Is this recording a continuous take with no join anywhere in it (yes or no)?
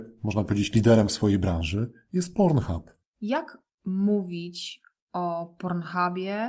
no